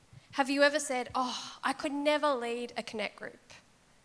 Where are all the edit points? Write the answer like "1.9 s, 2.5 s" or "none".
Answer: none